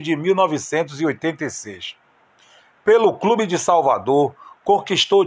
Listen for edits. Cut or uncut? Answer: uncut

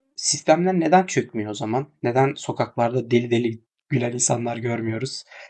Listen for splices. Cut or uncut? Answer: uncut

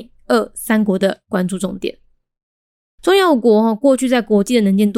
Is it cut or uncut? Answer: cut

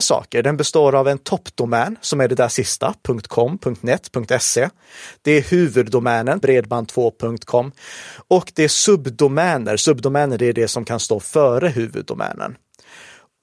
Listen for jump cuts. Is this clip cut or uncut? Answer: cut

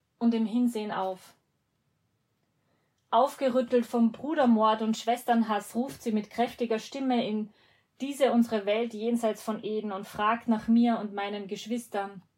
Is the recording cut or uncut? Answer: uncut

